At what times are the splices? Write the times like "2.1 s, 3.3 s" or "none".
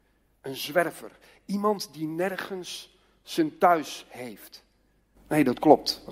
none